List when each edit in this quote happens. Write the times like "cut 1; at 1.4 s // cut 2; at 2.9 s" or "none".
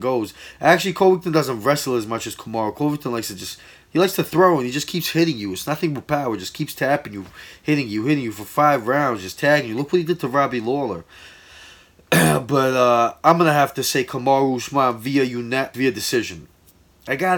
cut 1; at 15.7 s